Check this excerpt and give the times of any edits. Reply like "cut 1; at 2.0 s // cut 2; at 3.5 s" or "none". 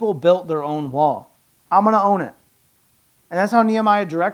cut 1; at 1.6 s